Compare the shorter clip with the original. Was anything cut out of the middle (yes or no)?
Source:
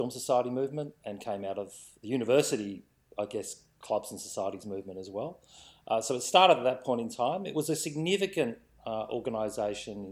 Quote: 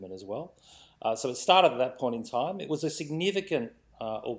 no